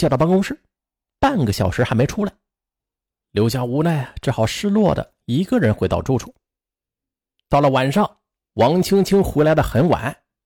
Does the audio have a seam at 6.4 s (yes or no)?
no